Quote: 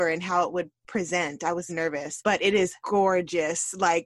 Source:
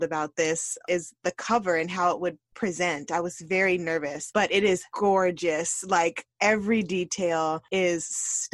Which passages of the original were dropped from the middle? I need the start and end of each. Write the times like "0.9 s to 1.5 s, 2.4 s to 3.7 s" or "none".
3.4 s to 3.8 s

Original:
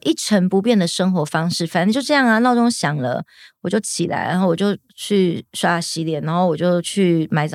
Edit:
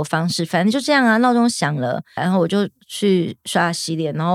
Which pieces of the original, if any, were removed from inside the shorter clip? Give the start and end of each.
3.4 s to 4.3 s

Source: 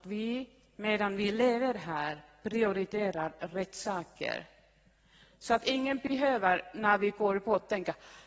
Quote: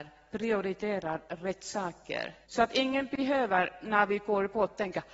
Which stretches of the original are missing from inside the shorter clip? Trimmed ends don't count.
4.5 s to 5.4 s

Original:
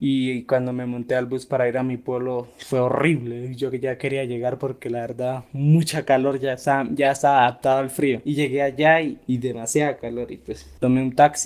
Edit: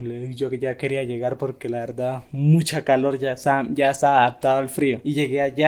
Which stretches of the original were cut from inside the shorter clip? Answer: none

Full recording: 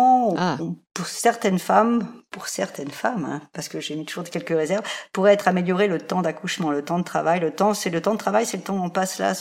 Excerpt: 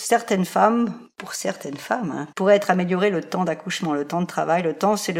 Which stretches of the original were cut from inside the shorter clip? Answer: 3.5 s to 5.1 s

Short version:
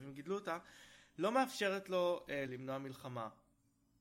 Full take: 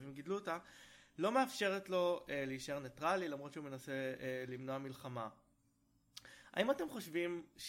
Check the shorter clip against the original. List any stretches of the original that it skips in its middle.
2.5 s to 4.5 s

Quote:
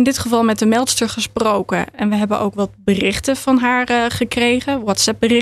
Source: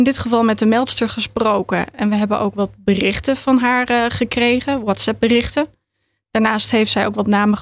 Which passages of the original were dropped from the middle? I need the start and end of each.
none

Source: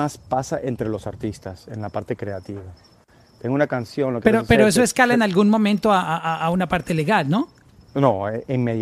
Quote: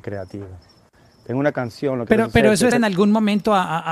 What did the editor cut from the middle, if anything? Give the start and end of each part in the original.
4.9 s to 5.1 s

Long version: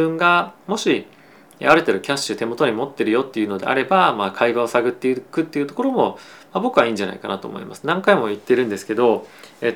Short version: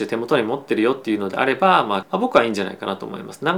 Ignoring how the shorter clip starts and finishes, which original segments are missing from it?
4.3 s to 6.4 s

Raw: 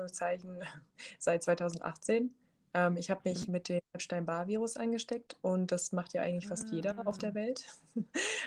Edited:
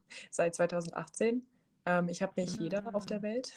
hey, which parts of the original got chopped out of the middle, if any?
3.5 s to 6.7 s

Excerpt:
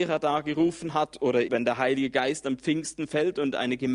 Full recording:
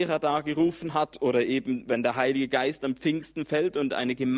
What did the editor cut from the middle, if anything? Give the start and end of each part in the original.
1.5 s to 1.8 s

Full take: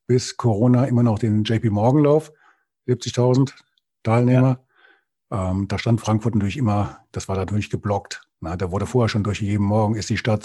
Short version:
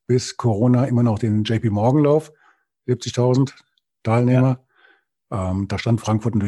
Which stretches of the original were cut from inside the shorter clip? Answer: none

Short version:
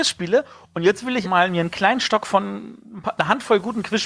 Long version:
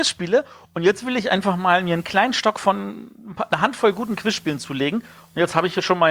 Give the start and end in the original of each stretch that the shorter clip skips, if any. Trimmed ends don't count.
1.2 s to 1.6 s

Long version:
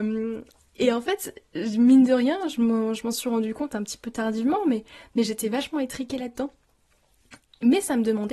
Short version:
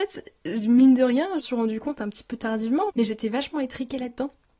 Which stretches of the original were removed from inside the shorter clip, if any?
2.5 s to 3.1 s, 4.6 s to 5.1 s

